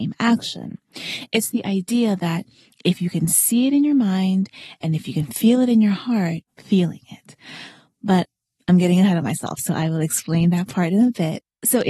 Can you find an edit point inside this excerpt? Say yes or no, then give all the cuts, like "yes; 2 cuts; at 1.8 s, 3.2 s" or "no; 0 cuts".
yes; 1 cut; at 6.5 s